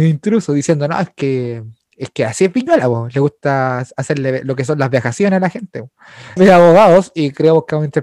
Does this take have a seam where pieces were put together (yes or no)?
yes